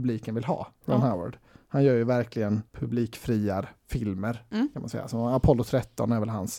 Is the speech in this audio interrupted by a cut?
yes; 1 cut; at 2.7 s

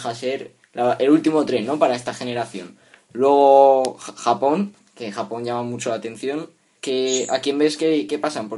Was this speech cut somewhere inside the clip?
yes; 1 cut; at 6.8 s

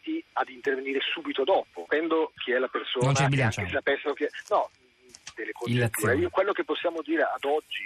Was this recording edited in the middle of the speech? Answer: yes; 2 cuts; at 1.9 s, 5.3 s

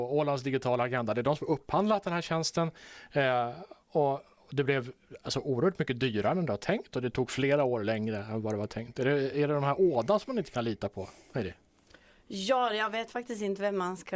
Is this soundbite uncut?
yes; 0 cuts

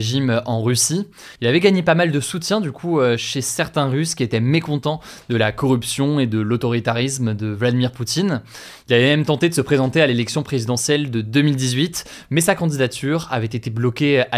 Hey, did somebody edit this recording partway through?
yes; 1 cut; at 1.4 s

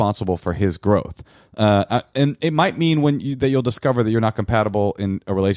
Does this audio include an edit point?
no; 0 cuts

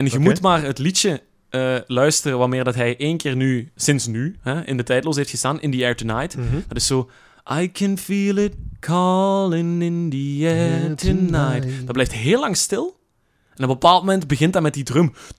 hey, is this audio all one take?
no; 1 cut; at 3.8 s

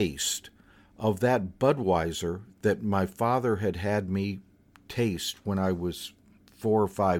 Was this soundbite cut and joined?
no; 0 cuts

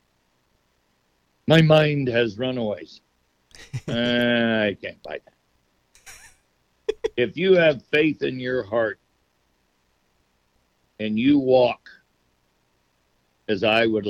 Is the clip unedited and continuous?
yes; 0 cuts

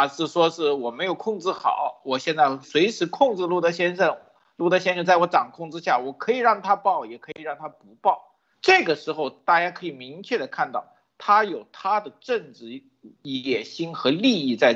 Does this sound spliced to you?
yes; 2 cuts; at 2.6 s, 8.5 s

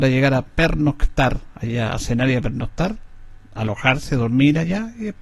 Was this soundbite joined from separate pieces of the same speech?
no; 0 cuts

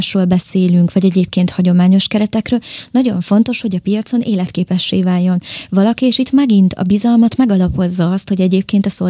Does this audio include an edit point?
no; 0 cuts

